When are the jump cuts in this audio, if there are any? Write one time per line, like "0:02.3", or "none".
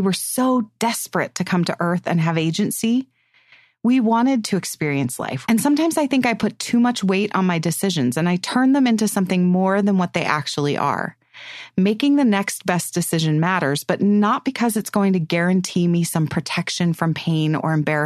0:05.4